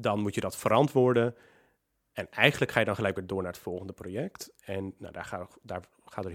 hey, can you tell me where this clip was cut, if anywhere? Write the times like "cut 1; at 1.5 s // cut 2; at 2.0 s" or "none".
none